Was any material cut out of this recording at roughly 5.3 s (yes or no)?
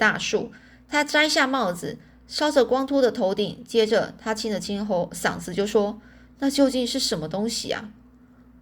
no